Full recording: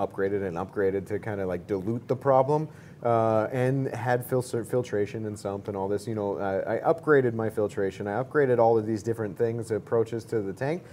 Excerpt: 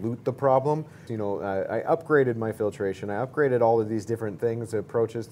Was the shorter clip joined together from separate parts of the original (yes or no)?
yes